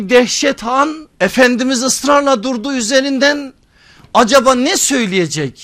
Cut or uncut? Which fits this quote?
cut